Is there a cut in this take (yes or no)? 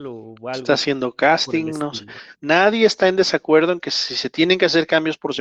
yes